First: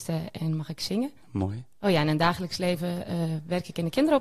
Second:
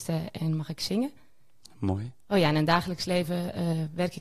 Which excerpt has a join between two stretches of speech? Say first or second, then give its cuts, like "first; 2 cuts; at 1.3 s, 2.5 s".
first; 1 cut; at 1.2 s